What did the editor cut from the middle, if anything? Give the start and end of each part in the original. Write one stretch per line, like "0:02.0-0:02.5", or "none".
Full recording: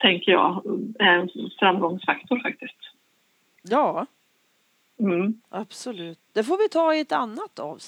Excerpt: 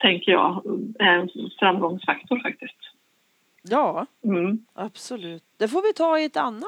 0:04.1-0:04.9